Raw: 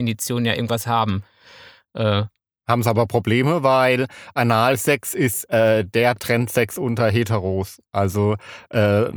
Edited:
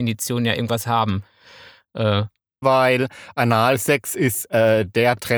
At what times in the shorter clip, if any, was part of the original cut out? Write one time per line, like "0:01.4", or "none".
0:02.6

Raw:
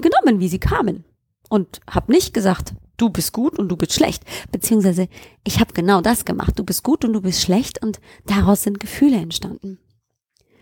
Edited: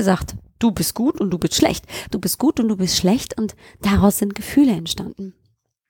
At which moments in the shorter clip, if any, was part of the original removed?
0:02.1

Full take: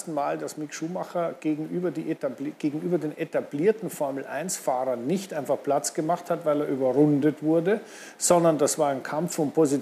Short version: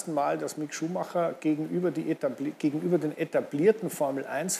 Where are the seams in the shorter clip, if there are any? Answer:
none

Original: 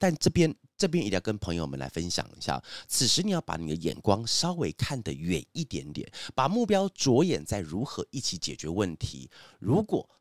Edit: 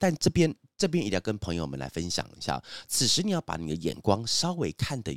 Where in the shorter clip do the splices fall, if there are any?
none

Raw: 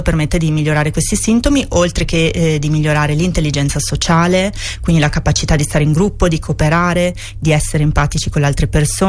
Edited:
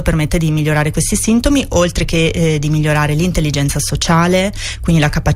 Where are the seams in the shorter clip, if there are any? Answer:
none

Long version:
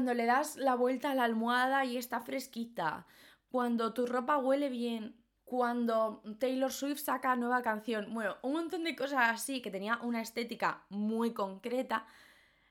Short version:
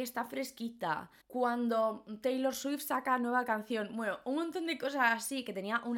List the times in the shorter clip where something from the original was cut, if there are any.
0:01.2

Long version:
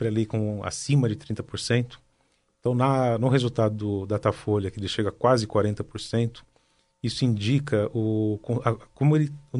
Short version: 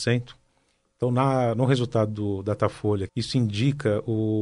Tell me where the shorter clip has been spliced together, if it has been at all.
0:03.1

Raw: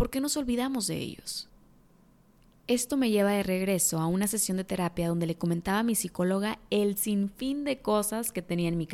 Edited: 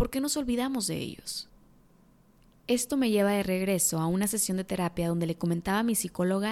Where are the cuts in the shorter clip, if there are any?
none

